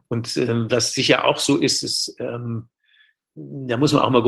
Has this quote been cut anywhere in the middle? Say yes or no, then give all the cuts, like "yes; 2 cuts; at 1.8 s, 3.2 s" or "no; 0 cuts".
no; 0 cuts